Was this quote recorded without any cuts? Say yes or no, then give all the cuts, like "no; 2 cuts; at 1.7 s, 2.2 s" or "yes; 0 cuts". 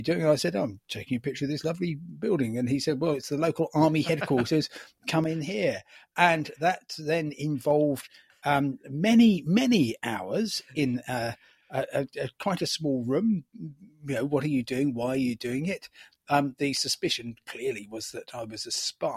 yes; 0 cuts